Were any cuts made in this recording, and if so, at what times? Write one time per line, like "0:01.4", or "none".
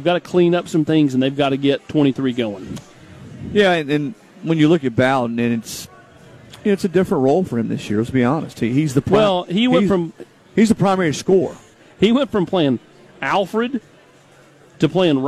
none